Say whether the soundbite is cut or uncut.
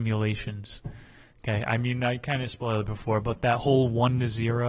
uncut